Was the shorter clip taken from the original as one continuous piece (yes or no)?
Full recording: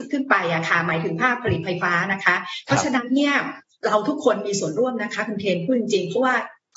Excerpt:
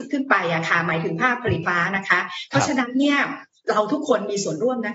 no